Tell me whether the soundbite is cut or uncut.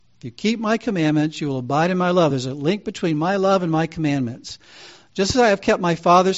uncut